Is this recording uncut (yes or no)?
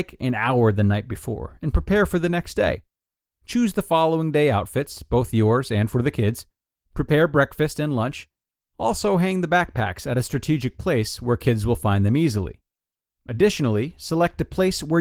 yes